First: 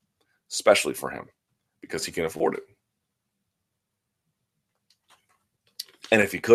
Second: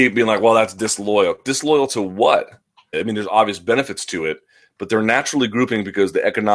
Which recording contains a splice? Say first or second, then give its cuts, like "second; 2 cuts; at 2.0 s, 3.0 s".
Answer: second; 1 cut; at 2.9 s